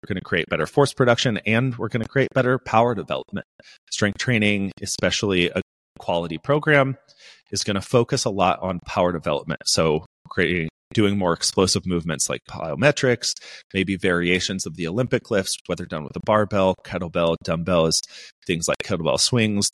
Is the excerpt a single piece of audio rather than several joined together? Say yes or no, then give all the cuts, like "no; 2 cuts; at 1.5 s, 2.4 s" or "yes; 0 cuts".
yes; 0 cuts